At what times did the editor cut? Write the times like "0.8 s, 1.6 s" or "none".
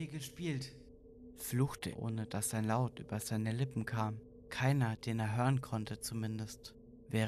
1.9 s